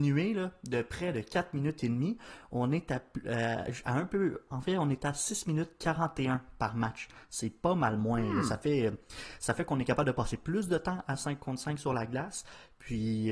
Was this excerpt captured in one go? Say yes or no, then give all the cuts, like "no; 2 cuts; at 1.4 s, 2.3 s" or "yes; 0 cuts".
yes; 0 cuts